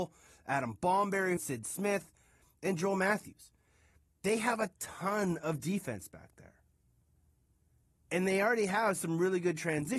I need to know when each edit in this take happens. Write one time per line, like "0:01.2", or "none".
0:01.4